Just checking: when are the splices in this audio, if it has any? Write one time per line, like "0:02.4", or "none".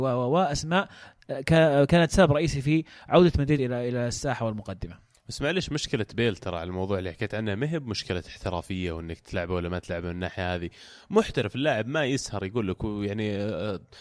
none